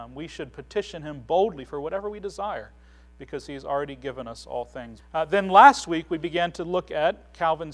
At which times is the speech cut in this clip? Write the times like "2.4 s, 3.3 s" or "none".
5.0 s